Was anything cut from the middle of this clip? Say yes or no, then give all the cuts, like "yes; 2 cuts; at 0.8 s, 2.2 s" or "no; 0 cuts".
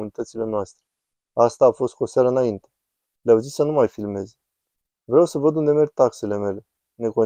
yes; 2 cuts; at 1.3 s, 3.0 s